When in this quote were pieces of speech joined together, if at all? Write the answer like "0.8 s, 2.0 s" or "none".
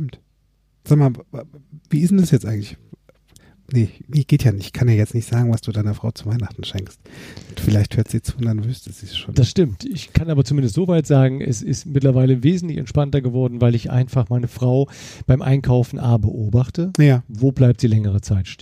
none

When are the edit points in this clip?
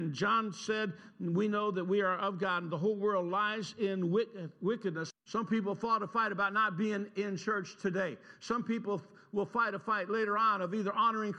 5.1 s

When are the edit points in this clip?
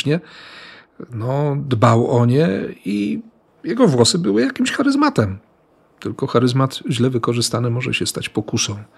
none

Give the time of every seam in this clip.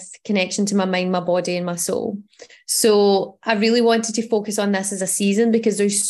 none

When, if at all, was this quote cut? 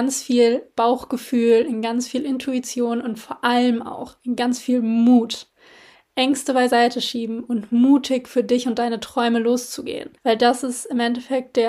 10.2 s

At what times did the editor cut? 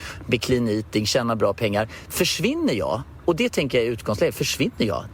none

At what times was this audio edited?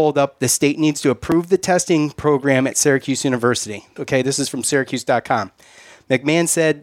4.0 s

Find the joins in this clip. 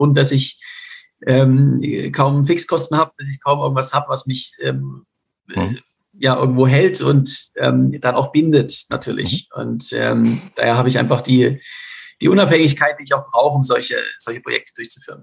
none

